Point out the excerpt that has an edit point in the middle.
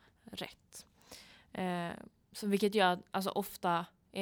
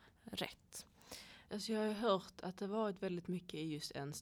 second; 1 cut; at 1.5 s

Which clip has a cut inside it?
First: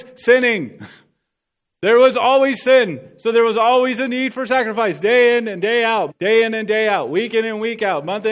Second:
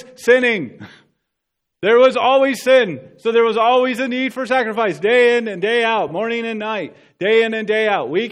first; 1 cut; at 6.1 s

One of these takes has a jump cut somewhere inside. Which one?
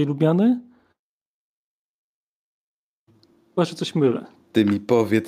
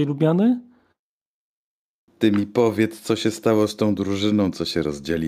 second; 1 cut; at 2.1 s

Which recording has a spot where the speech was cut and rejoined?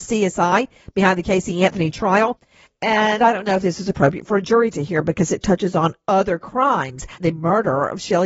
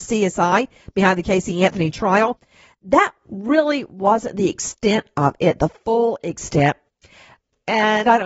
first; 2 cuts; at 2.7 s, 7.2 s

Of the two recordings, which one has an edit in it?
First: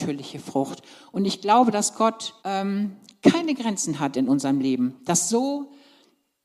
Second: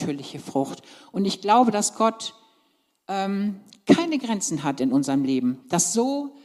first; 1 cut; at 2.4 s

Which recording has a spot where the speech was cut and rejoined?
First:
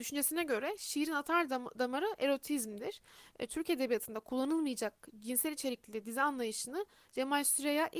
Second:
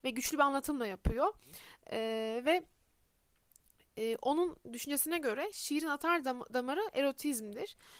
first; 1 cut; at 3.5 s

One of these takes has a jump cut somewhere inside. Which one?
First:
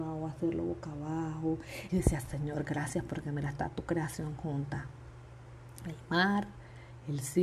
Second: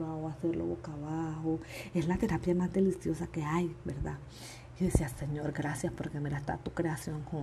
first; 1 cut; at 1.9 s

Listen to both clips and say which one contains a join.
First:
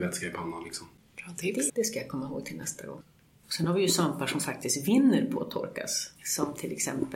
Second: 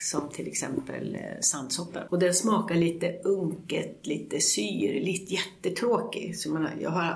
first; 2 cuts; at 1.7 s, 6.2 s

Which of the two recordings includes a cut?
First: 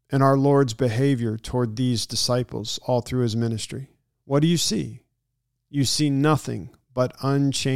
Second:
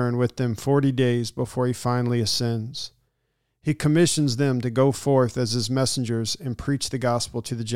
first; 1 cut; at 5.6 s

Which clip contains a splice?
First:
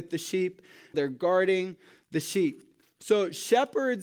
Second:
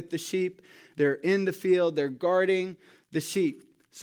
first; 2 cuts; at 0.9 s, 2.8 s

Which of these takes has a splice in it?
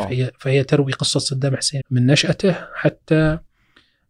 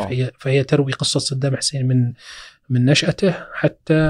first; 1 cut; at 1.8 s

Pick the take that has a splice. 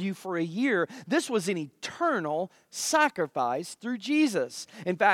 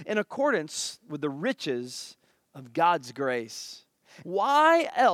second; 1 cut; at 4.2 s

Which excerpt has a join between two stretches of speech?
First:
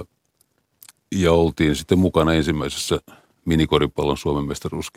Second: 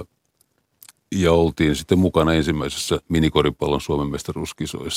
second; 1 cut; at 3.0 s

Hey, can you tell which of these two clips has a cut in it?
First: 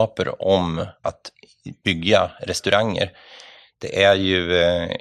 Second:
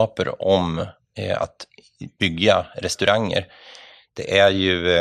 first; 1 cut; at 1.0 s

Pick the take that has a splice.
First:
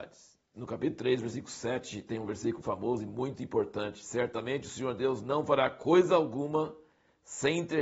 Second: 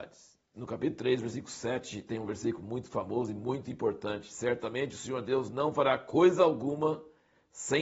first; 1 cut; at 2.6 s

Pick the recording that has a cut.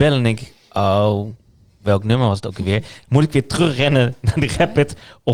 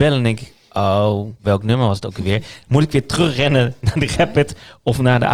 second; 1 cut; at 1.4 s

